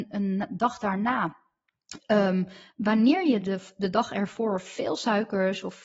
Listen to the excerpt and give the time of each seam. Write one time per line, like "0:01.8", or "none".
none